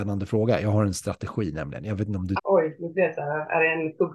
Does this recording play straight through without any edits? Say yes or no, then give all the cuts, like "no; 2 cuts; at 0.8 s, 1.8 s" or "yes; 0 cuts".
no; 1 cut; at 2.4 s